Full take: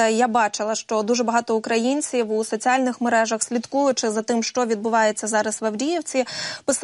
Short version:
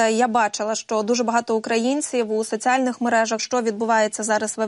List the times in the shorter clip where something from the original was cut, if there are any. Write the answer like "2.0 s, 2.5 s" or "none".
3.4 s